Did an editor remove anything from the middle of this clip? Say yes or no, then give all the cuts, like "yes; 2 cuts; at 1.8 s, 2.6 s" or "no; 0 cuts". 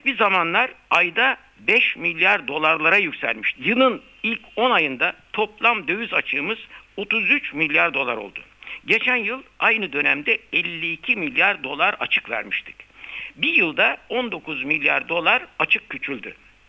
yes; 1 cut; at 3.5 s